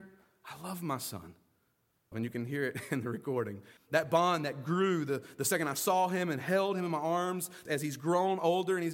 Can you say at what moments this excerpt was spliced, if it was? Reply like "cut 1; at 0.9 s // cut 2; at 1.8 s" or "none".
cut 1; at 2.1 s // cut 2; at 3.8 s // cut 3; at 7.7 s